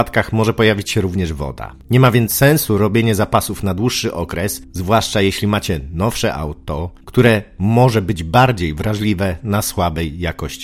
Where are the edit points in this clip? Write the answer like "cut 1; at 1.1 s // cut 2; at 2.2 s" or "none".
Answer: none